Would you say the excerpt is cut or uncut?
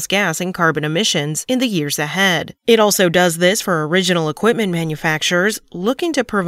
cut